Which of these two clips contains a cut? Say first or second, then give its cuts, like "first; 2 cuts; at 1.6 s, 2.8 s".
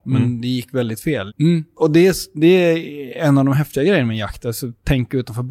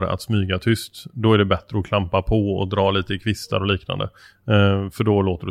first; 1 cut; at 1.3 s